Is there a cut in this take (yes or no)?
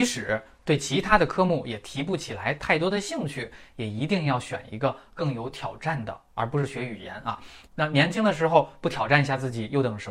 yes